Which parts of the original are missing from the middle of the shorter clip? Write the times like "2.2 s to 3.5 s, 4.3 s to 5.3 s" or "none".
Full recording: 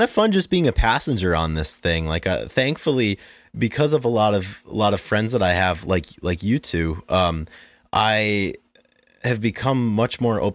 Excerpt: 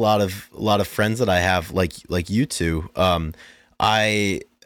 none